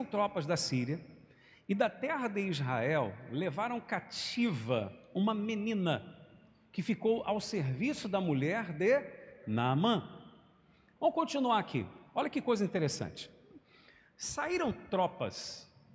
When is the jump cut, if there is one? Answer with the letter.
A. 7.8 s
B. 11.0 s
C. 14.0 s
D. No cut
B